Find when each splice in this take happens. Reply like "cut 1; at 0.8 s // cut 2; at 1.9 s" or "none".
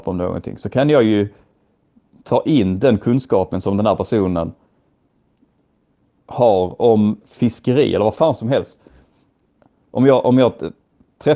cut 1; at 7.2 s